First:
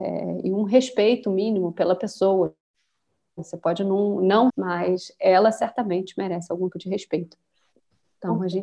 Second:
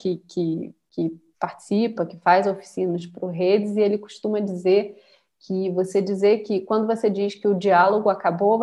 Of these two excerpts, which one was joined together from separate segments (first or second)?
first